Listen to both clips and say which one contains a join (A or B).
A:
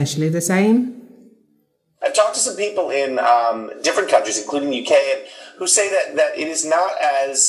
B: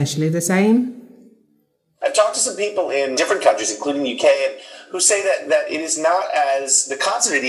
B